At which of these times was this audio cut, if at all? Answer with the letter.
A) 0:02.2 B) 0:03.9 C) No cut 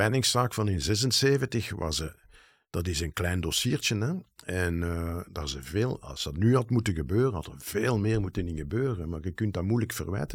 C